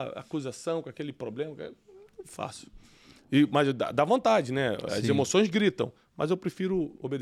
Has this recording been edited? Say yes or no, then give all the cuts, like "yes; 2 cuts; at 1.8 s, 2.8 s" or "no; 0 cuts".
no; 0 cuts